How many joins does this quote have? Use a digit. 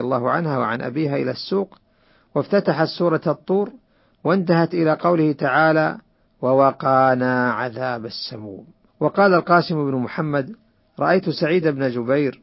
1